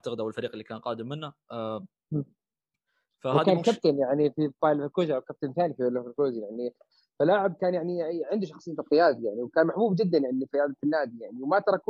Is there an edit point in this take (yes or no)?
no